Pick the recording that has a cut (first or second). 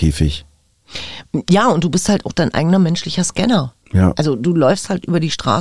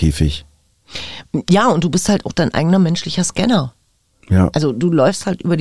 first